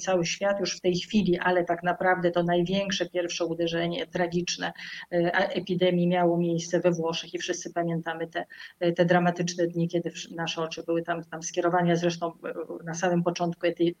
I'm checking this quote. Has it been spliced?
no; 0 cuts

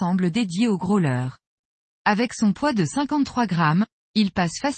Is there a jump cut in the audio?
yes; 1 cut; at 1.9 s

